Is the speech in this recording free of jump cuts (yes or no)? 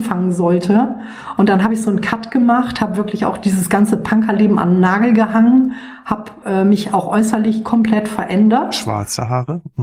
yes